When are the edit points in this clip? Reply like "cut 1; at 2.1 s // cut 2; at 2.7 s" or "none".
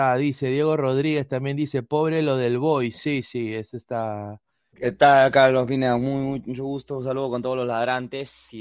cut 1; at 3.2 s // cut 2; at 4.7 s